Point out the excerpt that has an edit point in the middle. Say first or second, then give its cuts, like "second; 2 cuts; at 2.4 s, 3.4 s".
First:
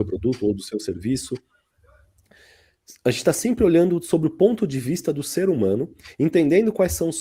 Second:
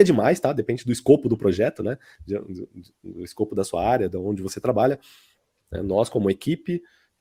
second; 1 cut; at 5.6 s